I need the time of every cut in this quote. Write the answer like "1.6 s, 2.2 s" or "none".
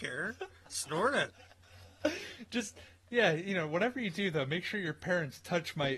none